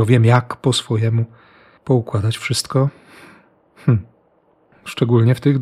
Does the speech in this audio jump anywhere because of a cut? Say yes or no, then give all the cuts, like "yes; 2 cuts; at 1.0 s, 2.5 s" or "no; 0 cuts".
no; 0 cuts